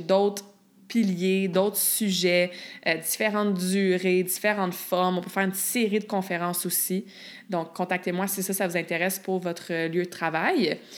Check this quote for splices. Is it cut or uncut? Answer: uncut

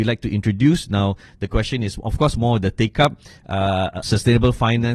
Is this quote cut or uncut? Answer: cut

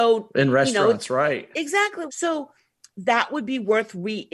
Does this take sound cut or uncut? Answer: cut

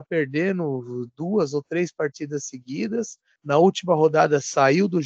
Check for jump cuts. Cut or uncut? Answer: cut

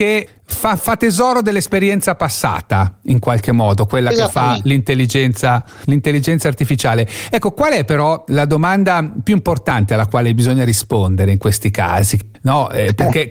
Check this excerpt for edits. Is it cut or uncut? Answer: uncut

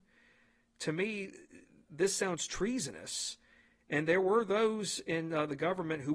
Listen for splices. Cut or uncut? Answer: uncut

